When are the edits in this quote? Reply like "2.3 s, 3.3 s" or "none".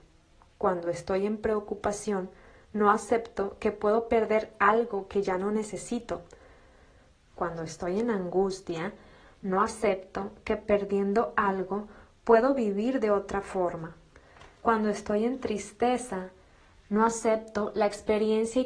7.2 s